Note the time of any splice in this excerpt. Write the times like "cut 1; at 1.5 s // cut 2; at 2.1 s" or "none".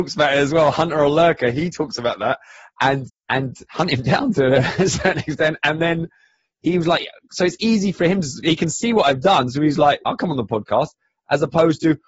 cut 1; at 3.1 s // cut 2; at 10.0 s